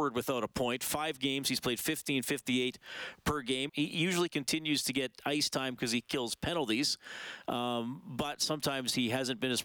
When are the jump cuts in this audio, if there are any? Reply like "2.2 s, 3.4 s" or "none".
3.7 s

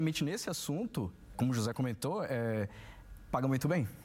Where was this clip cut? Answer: 1.3 s

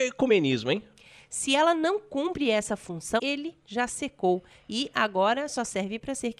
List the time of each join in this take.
3.2 s

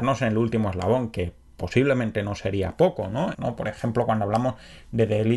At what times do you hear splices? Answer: 3.3 s

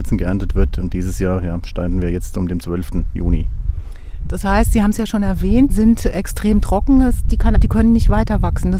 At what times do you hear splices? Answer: 5.7 s, 7.5 s

